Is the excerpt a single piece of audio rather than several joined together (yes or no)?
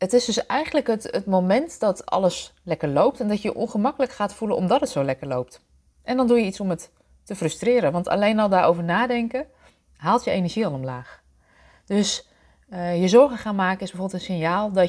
yes